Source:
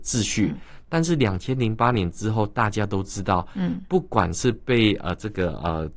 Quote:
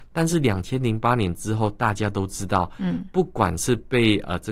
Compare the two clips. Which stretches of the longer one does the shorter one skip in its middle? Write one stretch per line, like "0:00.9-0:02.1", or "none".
none